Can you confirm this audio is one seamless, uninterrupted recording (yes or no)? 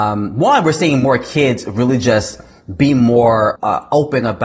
no